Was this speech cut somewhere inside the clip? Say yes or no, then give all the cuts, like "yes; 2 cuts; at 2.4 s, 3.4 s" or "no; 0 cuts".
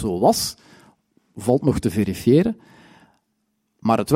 no; 0 cuts